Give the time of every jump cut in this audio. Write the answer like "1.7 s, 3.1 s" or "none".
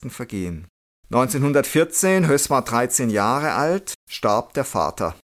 0.9 s, 4.0 s